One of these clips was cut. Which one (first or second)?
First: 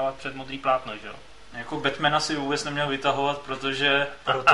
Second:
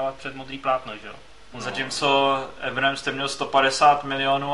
second